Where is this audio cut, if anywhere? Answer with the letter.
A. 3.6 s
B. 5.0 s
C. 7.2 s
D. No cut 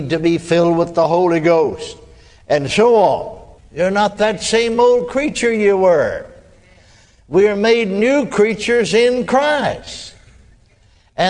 A